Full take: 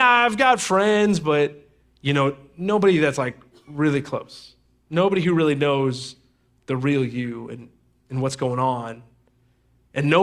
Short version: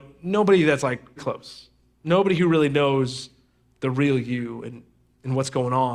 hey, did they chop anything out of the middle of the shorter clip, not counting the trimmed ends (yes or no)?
yes